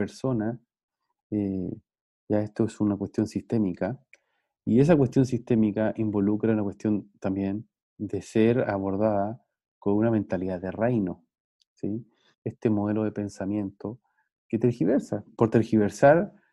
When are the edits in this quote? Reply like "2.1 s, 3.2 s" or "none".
12.3 s, 15.3 s